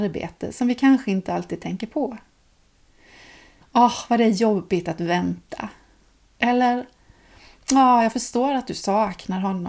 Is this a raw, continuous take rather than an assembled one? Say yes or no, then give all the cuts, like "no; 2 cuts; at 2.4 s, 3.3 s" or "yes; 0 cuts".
no; 1 cut; at 3.6 s